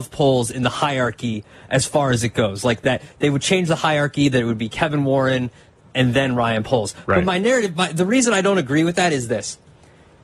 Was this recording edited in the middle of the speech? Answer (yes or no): yes